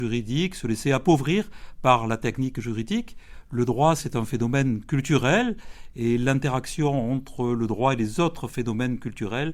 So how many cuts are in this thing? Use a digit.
0